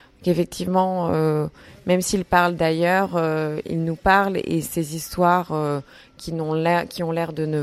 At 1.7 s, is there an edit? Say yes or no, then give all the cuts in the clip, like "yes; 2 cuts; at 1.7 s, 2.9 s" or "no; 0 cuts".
no; 1 cut; at 3.6 s